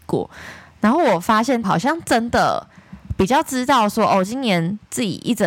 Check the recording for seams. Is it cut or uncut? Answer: cut